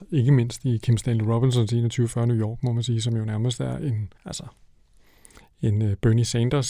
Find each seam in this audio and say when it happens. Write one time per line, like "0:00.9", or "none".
0:04.2